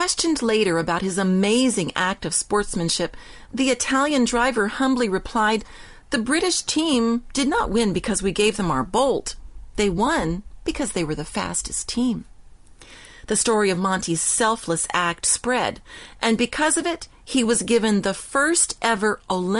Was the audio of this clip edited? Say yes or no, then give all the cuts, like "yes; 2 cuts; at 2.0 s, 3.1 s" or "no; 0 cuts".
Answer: no; 0 cuts